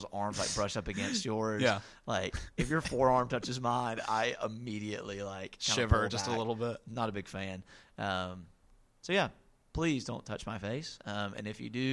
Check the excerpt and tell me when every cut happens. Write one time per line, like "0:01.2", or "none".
none